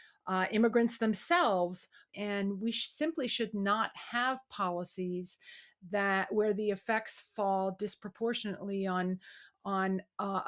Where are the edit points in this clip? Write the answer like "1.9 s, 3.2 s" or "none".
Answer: 2.1 s